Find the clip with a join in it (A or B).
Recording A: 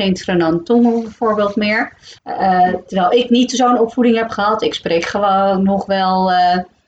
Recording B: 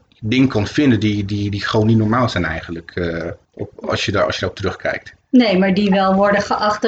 A